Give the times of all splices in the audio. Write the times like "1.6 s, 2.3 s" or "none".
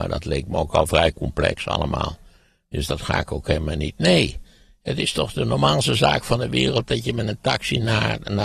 none